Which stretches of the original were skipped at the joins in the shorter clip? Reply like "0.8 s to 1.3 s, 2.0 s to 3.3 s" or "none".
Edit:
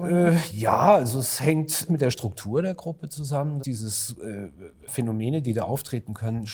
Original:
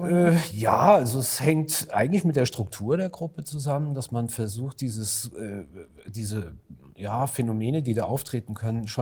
1.9 s to 2.2 s, 3.9 s to 4.7 s, 6.0 s to 7.3 s